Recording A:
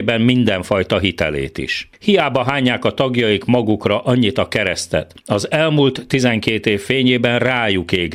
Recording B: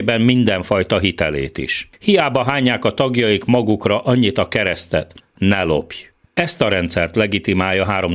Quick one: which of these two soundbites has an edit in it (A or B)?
B